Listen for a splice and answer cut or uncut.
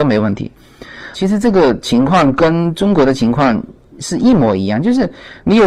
cut